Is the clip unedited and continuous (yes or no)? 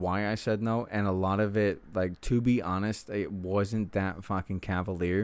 yes